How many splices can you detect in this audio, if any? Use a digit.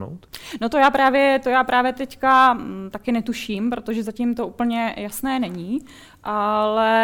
0